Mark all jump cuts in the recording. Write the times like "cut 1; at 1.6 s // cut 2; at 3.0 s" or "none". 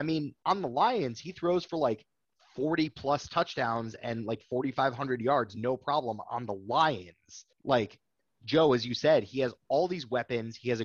cut 1; at 7.5 s